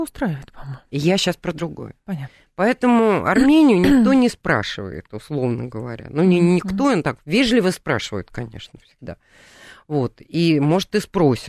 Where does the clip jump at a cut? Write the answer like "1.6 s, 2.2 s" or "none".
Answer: none